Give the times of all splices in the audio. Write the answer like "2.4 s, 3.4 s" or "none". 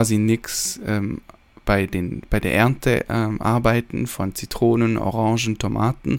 none